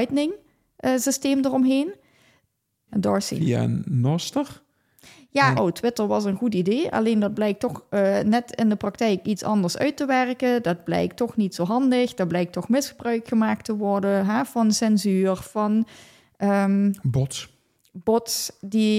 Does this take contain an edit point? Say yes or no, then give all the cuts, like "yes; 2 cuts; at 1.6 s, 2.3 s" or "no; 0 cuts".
yes; 2 cuts; at 2.9 s, 5.6 s